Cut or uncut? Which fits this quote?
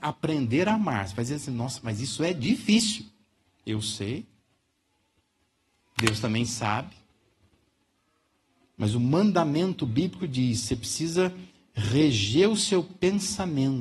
uncut